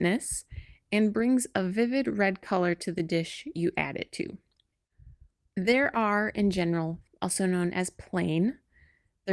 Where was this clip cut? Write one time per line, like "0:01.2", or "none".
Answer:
0:05.5
0:07.1

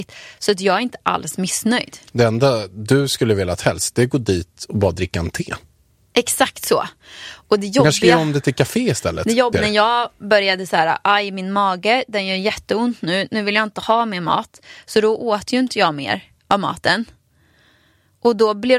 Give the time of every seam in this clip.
0:09.5

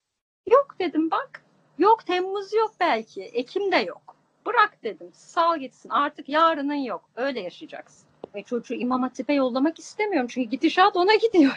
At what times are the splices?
0:08.3

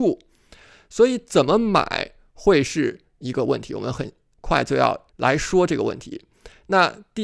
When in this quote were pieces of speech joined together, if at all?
0:05.1

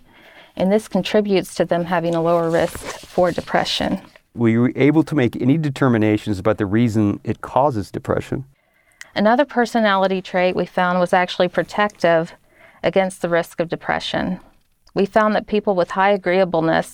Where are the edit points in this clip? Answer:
0:09.0

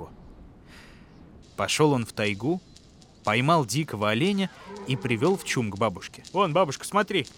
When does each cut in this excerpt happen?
0:01.4

